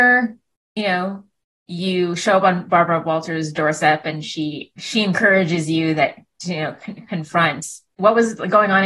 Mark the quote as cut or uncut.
uncut